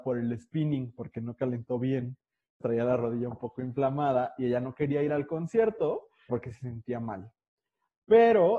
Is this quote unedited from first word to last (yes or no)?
no